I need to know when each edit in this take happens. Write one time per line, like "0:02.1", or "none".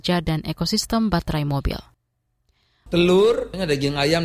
0:02.9